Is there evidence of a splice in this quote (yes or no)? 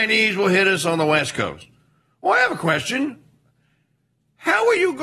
no